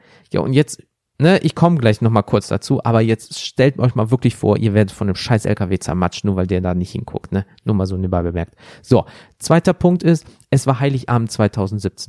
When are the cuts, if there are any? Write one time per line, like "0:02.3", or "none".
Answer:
none